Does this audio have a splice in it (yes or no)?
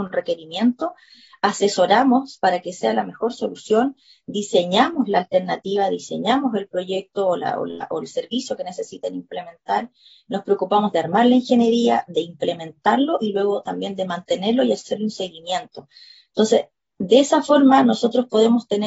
no